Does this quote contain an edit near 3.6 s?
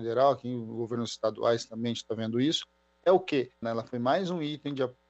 yes; 1 cut; at 3.6 s

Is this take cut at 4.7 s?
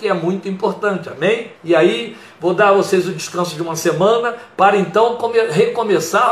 no; 1 cut; at 1.6 s

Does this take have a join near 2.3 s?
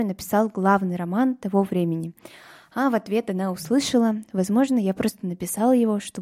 no; 0 cuts

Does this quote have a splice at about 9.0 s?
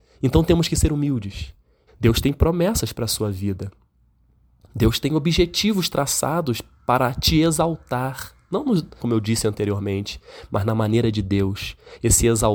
yes; 2 cuts; at 1.9 s, 9.0 s

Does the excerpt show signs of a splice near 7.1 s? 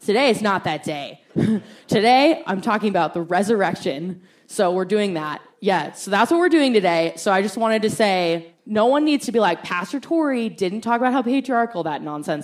no; 1 cut; at 1.3 s

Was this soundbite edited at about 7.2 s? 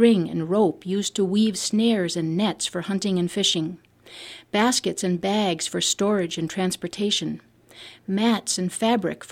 no; 0 cuts

